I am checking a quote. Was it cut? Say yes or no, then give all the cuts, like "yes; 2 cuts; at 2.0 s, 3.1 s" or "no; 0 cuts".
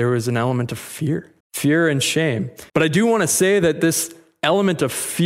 yes; 2 cuts; at 1.4 s, 2.7 s